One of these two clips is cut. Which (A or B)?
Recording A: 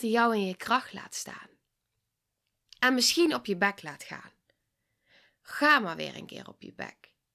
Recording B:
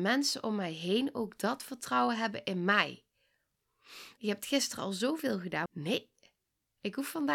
B